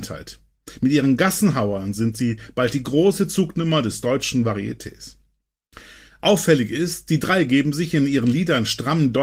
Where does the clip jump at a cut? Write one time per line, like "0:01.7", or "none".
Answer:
none